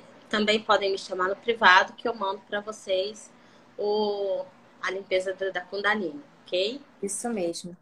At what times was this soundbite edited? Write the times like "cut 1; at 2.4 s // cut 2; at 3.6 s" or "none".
cut 1; at 5.5 s